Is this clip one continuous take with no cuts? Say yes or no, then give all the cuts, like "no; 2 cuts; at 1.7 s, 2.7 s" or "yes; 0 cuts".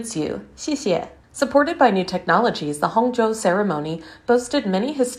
no; 1 cut; at 1.2 s